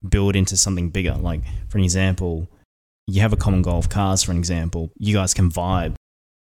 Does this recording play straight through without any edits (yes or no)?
no